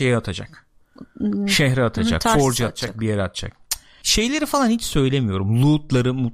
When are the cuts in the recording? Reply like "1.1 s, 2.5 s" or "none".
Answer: 4.0 s